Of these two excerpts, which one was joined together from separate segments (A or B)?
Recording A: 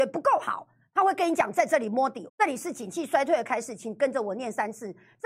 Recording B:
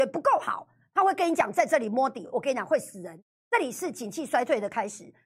A